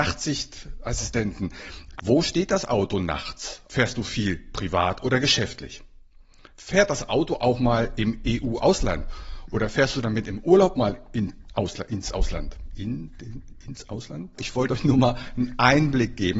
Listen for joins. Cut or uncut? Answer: cut